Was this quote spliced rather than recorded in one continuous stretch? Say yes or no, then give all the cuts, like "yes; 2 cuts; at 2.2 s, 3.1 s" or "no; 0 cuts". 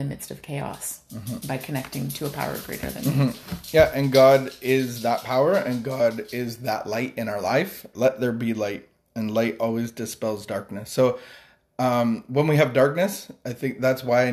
yes; 1 cut; at 7.9 s